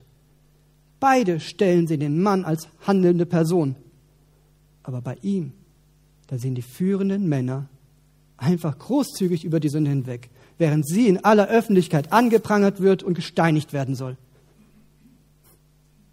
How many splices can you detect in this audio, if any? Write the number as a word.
zero